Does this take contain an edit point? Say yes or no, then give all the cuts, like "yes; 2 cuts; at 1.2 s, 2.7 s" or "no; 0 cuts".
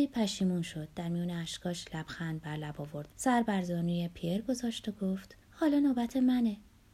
yes; 2 cuts; at 3.1 s, 5.4 s